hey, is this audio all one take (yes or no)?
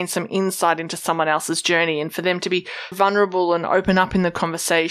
no